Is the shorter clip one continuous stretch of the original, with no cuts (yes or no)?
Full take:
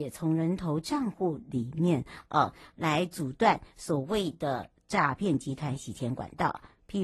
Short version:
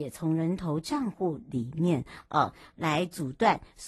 yes